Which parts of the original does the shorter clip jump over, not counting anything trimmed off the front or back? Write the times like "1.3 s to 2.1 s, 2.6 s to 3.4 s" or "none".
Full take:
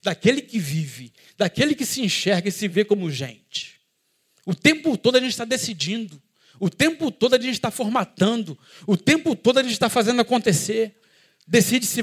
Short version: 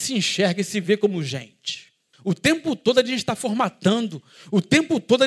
4.0 s to 6.5 s